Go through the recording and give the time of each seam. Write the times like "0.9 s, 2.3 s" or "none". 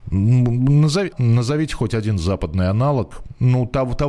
1.1 s